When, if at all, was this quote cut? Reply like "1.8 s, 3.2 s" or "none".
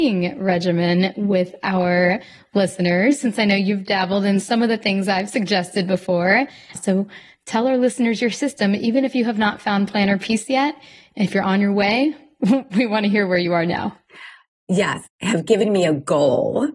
6.8 s, 15.1 s